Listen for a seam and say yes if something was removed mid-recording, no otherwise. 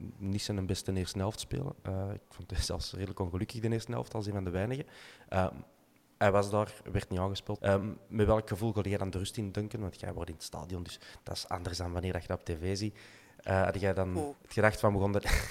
yes